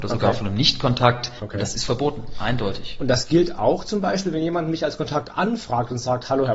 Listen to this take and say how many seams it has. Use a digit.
1